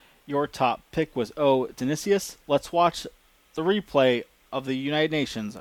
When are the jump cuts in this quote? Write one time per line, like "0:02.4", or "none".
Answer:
0:02.4